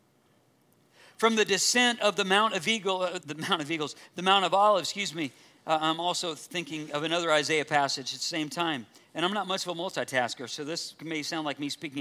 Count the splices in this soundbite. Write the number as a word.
one